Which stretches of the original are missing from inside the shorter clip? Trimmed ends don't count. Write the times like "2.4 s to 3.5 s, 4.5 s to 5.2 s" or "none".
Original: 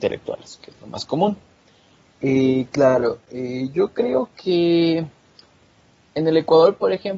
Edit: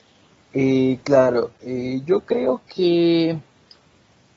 none